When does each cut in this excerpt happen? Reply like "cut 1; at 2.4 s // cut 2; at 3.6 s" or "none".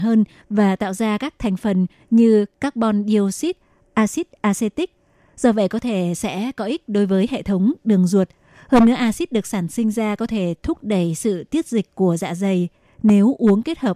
none